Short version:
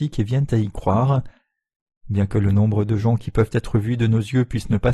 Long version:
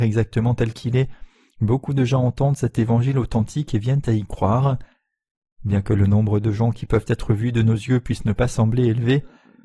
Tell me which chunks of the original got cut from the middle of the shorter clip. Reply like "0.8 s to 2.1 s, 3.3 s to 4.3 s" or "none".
none